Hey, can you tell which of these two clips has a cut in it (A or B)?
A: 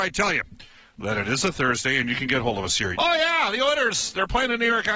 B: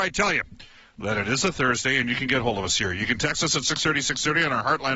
A